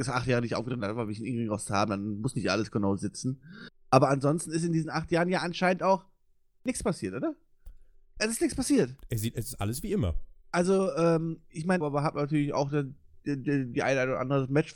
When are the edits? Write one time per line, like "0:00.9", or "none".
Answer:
0:11.8

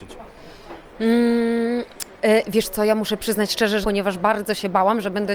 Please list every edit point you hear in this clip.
0:03.8

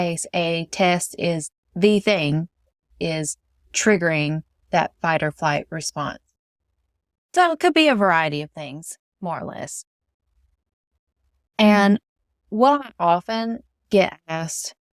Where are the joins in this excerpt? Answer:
none

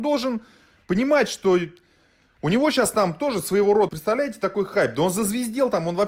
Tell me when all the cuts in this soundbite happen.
0:03.9

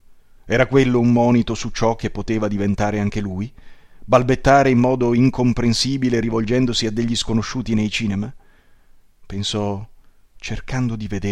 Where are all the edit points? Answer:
none

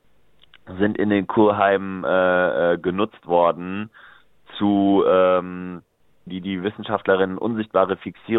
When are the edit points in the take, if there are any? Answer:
0:06.3

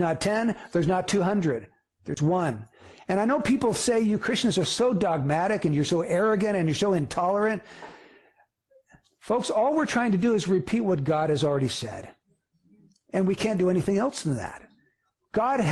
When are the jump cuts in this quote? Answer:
none

